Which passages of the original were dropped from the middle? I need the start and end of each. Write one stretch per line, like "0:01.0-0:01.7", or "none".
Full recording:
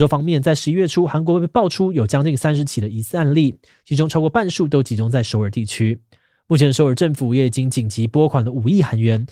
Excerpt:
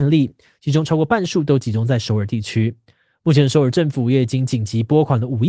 none